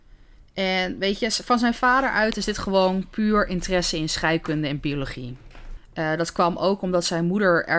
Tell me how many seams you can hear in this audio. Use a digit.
1